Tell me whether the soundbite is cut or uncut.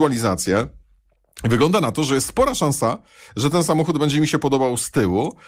uncut